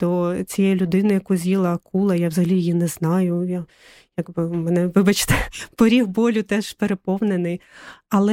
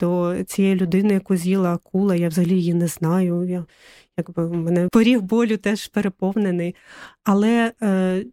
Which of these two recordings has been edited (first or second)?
second